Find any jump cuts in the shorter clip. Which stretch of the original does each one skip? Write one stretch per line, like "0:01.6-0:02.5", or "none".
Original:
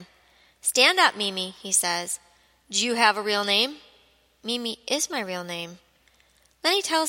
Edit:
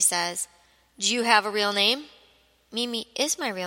none